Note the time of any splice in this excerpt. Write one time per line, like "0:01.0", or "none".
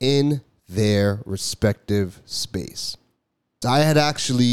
0:03.6